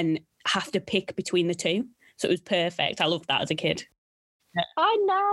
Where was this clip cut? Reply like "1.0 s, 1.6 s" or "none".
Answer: 4.4 s